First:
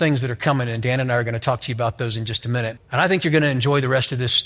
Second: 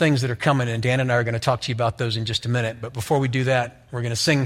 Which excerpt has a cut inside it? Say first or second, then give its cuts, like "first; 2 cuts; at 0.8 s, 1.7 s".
first; 1 cut; at 2.8 s